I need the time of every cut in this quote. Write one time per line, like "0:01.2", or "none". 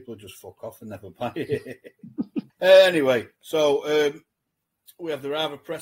0:02.5